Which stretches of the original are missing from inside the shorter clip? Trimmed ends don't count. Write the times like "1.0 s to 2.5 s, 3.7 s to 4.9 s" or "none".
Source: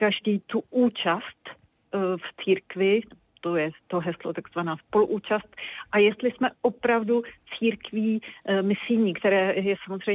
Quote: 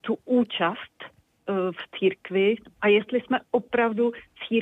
3.2 s to 5.9 s

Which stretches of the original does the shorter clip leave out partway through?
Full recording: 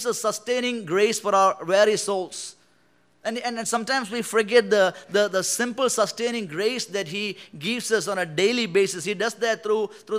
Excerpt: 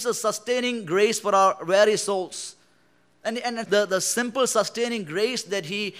3.6 s to 5.1 s

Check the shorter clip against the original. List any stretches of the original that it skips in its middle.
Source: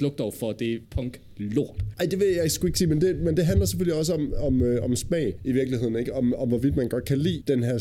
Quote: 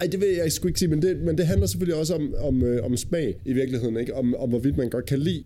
none

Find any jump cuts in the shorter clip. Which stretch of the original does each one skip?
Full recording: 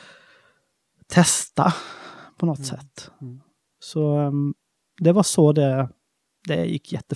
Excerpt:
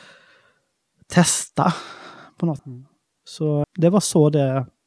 2.6 s to 3.1 s, 4.2 s to 4.9 s

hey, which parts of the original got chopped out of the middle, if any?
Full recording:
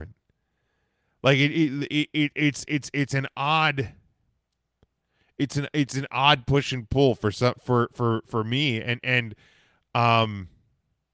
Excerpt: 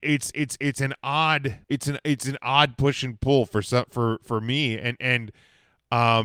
4.0 s to 5.3 s, 7.5 s to 7.9 s

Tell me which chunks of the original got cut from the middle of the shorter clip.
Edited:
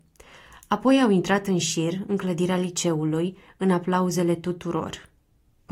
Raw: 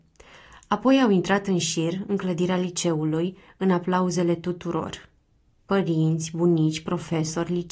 none

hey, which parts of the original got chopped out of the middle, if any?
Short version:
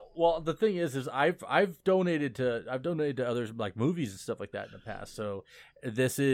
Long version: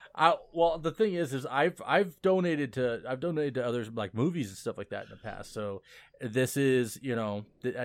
none

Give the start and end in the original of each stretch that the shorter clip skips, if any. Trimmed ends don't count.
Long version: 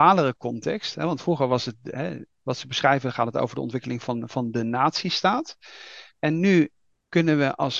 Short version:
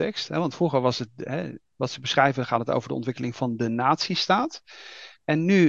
4.0 s to 4.3 s

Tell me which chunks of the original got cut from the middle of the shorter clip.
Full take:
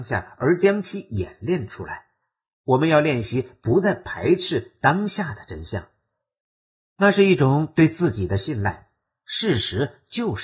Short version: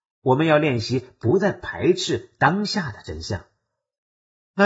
none

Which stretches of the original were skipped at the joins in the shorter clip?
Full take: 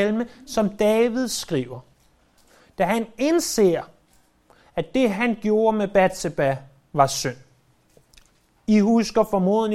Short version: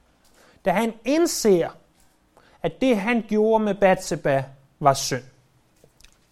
none

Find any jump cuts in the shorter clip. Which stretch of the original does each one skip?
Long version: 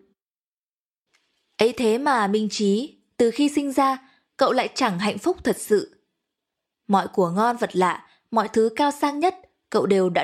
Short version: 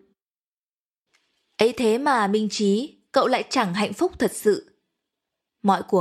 3.0 s to 4.3 s

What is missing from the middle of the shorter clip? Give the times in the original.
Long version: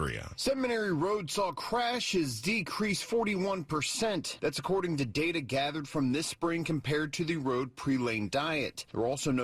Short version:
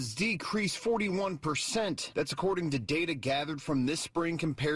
none

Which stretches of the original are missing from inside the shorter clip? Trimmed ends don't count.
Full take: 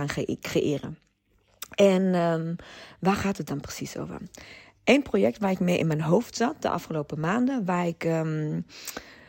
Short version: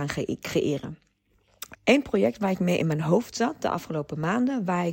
1.7 s to 4.7 s

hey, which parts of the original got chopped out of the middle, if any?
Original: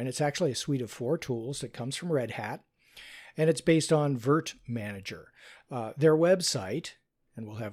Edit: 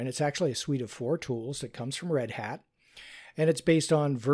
none

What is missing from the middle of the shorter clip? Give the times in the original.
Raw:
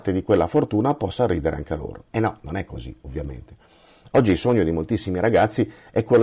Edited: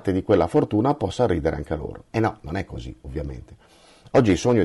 none

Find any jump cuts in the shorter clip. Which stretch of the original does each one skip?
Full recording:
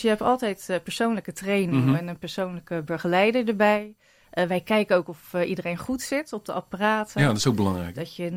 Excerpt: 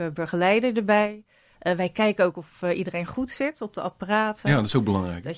none

